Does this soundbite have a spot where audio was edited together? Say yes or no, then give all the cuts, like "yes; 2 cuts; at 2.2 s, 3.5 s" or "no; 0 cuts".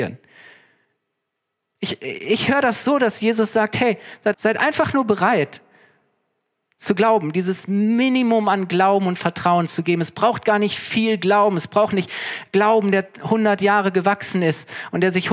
yes; 1 cut; at 4.3 s